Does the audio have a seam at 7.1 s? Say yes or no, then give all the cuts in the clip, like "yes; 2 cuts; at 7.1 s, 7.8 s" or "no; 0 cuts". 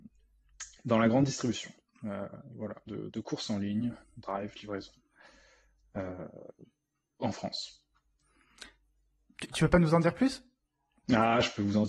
no; 1 cut; at 2.9 s